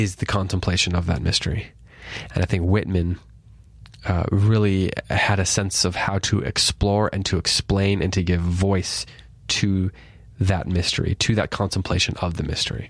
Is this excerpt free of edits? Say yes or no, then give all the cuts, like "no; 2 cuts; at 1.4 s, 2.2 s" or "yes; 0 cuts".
yes; 0 cuts